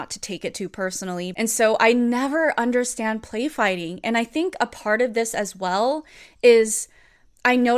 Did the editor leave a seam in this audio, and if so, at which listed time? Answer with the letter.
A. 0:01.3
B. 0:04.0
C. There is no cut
A